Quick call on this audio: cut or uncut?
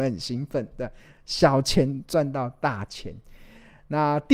uncut